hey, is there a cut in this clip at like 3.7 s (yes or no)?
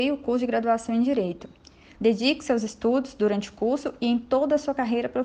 no